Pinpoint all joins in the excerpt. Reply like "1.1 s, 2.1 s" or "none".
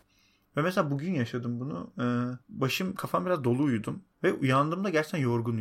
2.4 s, 4.1 s